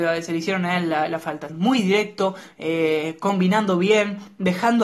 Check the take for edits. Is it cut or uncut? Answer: cut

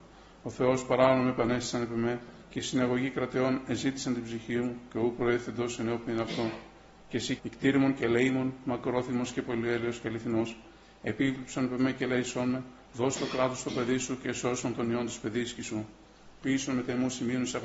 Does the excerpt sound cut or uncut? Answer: cut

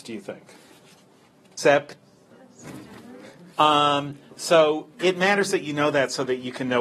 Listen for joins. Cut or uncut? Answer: cut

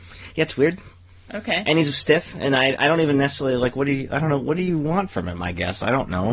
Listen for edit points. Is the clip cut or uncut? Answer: uncut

